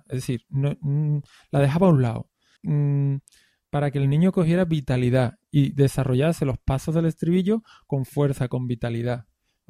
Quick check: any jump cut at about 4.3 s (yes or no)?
no